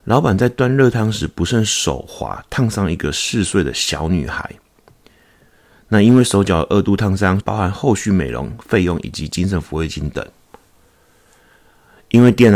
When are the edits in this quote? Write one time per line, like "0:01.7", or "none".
0:07.4